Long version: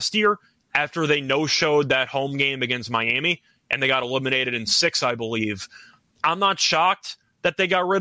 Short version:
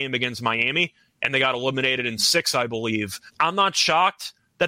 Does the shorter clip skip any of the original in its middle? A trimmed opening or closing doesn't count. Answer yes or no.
yes